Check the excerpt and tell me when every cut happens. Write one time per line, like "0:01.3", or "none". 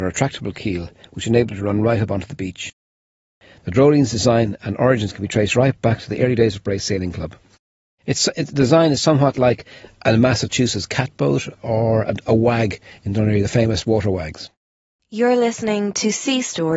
none